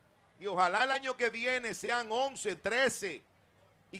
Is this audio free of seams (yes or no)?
no